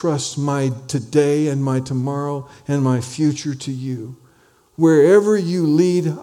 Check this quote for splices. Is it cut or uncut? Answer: uncut